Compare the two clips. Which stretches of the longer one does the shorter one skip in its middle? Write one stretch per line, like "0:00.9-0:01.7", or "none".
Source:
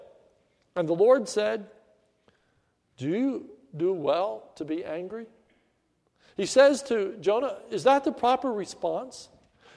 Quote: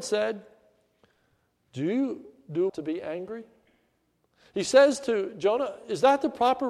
0:03.9-0:04.5